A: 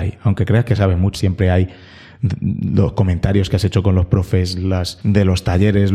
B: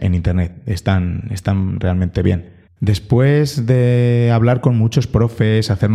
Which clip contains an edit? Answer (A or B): A